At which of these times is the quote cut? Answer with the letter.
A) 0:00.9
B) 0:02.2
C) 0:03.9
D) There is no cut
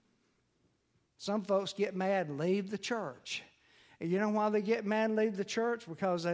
D